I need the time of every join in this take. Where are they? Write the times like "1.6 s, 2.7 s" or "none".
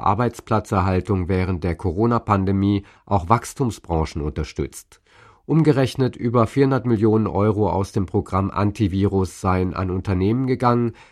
none